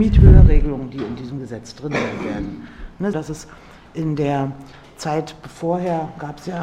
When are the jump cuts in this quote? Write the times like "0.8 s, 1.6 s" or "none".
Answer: 3.1 s

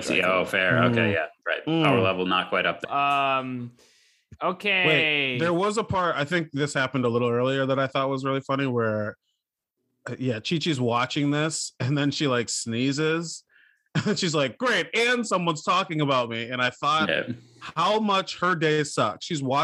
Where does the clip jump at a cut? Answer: 2.8 s

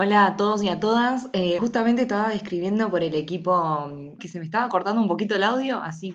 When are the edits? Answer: 1.6 s, 4.2 s

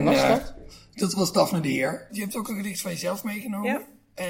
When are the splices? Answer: 2.1 s

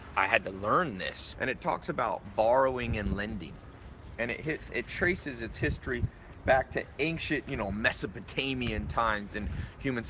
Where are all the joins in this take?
1.3 s

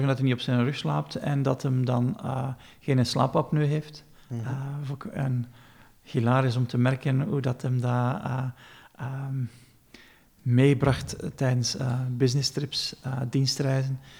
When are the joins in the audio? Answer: none

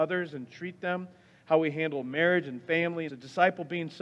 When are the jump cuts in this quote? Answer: 3.1 s

